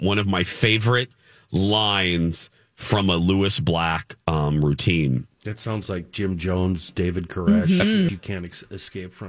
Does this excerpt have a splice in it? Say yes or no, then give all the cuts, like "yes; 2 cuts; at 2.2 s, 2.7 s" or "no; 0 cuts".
yes; 2 cuts; at 5.3 s, 8.1 s